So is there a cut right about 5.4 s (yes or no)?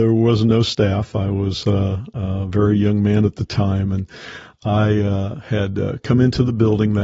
no